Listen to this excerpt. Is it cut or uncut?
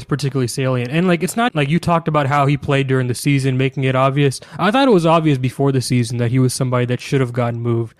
cut